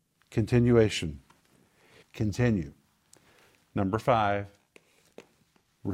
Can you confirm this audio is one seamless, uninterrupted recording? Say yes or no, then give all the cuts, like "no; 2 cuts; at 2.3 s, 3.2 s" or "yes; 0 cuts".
no; 1 cut; at 2.0 s